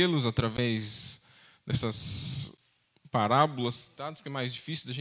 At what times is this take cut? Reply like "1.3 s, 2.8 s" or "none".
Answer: none